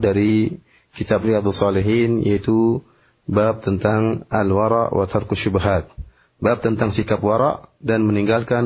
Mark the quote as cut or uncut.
uncut